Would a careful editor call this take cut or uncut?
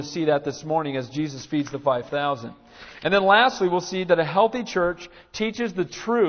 uncut